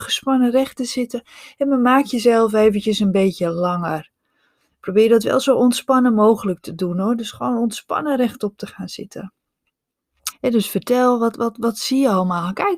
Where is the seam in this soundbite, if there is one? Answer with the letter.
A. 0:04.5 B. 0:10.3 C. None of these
B